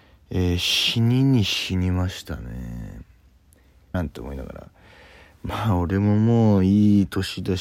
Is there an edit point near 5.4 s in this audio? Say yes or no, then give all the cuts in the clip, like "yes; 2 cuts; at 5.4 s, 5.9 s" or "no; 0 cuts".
no; 1 cut; at 3.9 s